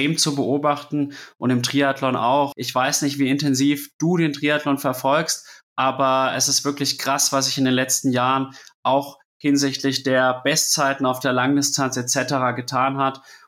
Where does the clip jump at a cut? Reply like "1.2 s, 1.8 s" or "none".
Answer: 2.5 s